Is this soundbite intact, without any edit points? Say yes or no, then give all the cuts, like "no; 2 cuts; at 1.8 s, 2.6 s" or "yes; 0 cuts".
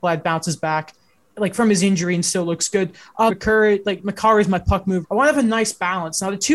no; 2 cuts; at 3.3 s, 5.0 s